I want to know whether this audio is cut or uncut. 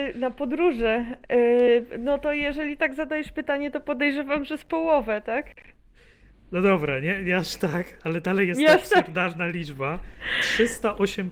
uncut